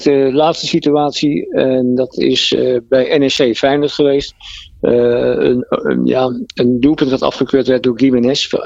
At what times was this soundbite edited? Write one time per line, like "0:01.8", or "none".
0:05.6